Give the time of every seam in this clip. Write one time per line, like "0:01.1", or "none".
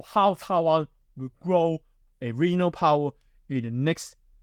0:02.1